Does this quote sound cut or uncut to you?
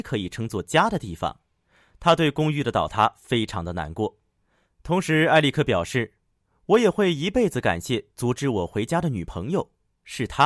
uncut